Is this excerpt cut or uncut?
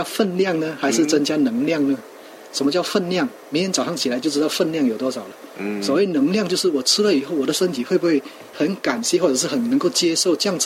uncut